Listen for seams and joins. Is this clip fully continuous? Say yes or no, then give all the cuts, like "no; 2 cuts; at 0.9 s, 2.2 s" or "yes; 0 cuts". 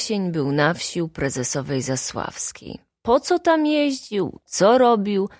yes; 0 cuts